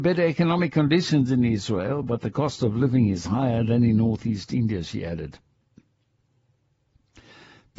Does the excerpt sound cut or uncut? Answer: uncut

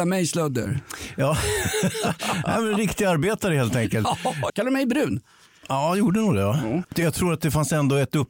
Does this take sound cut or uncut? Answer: cut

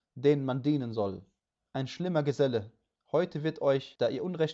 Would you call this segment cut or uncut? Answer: cut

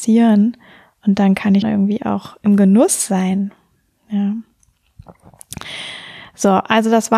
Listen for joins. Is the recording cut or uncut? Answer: cut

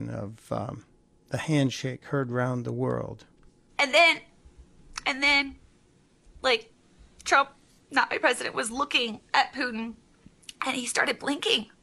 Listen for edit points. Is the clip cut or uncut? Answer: uncut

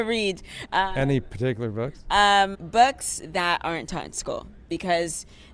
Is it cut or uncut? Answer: cut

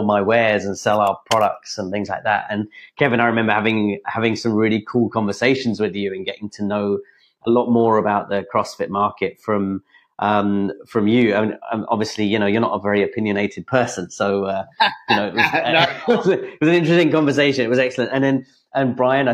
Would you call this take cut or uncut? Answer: uncut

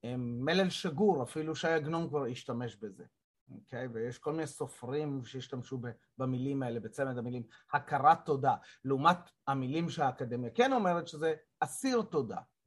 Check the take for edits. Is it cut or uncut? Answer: uncut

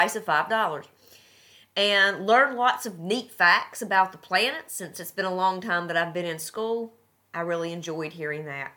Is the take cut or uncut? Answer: uncut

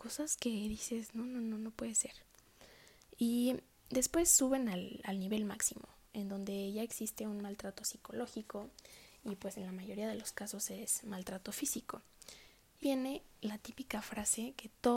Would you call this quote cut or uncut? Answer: cut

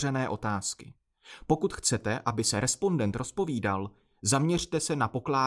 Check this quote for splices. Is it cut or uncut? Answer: uncut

